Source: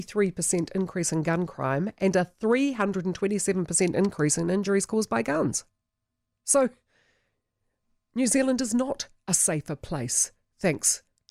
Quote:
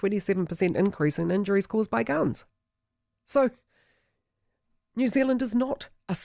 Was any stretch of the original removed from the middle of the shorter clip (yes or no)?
no